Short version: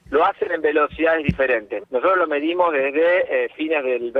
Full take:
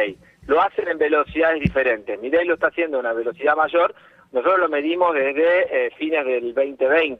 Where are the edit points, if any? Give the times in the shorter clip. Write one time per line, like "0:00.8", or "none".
0:01.8